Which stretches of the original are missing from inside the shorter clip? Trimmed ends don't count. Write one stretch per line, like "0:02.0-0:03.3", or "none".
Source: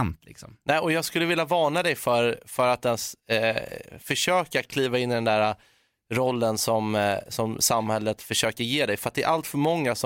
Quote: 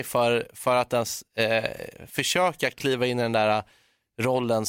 none

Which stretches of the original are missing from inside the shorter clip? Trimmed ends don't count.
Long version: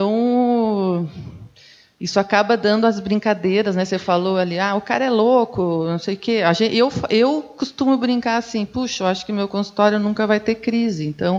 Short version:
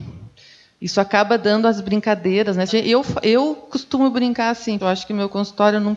0:03.9-0:06.5
0:08.7-0:09.0

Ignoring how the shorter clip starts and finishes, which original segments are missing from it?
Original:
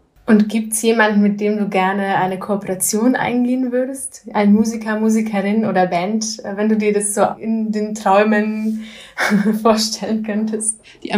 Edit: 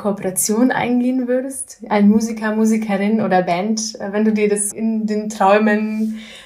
0:07.1-0:07.4

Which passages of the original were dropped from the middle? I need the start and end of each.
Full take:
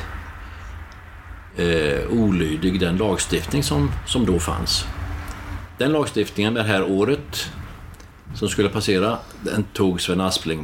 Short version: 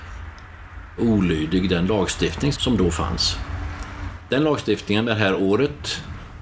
0:01.5-0:02.1
0:03.6-0:04.0

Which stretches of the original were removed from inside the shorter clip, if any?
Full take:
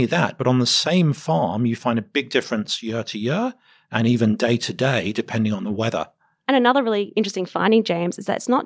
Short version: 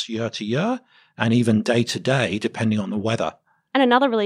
none

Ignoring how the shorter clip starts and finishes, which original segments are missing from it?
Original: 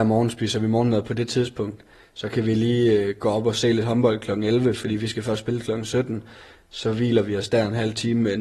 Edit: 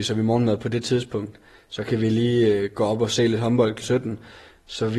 0:04.3-0:05.8

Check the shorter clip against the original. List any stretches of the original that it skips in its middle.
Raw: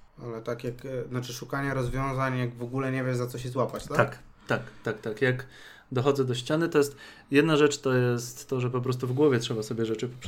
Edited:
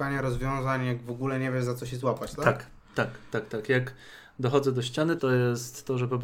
0:06.7-0:07.8

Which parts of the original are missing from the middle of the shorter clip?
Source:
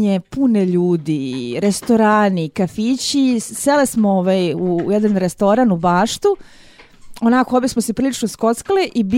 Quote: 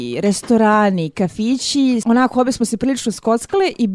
0:03.4-0:07.2

